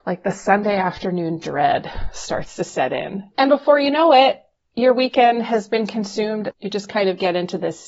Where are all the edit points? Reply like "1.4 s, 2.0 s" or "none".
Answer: 3.3 s, 6.5 s